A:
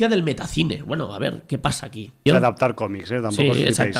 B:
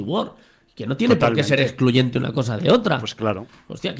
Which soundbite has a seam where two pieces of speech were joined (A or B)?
A